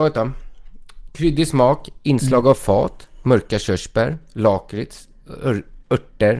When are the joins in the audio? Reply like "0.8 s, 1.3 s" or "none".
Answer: none